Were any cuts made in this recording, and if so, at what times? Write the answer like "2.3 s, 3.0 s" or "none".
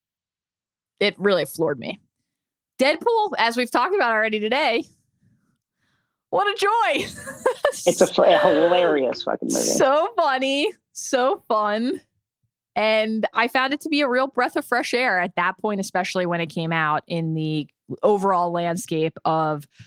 none